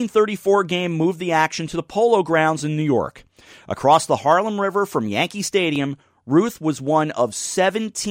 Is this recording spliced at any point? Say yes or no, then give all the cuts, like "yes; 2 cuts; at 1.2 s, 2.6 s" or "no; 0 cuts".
no; 0 cuts